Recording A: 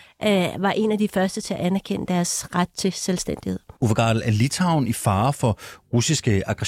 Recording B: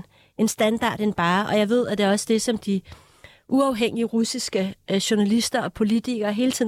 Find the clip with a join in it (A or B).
A